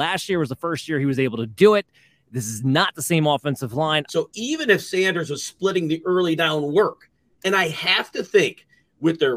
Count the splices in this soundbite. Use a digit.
2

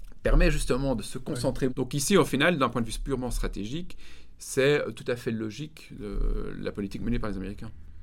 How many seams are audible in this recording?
1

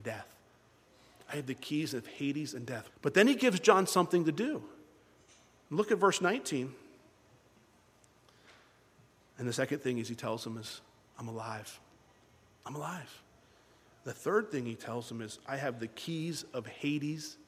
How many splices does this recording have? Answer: 2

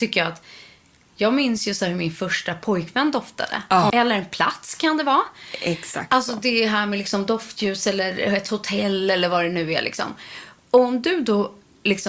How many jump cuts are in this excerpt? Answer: 1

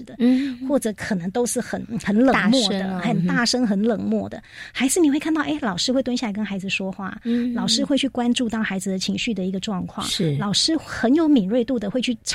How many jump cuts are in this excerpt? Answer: 0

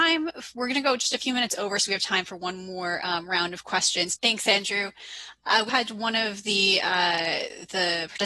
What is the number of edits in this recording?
2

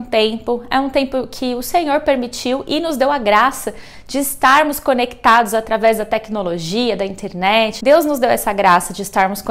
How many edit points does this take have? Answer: 1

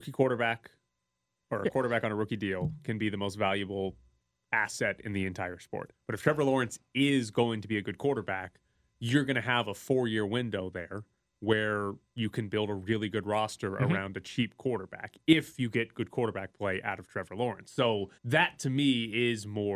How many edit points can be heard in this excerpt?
2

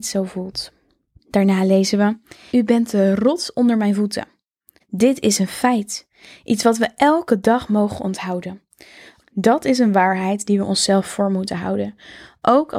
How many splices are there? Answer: 3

